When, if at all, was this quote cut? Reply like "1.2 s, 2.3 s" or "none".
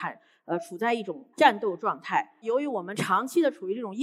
1.3 s